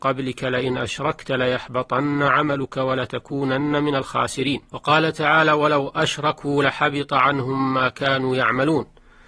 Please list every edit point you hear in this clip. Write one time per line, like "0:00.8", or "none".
0:04.7